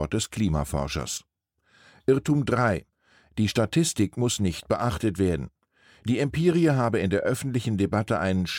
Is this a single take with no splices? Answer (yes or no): yes